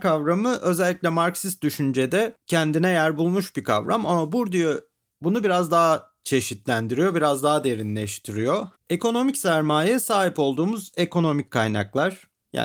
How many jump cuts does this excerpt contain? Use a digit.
1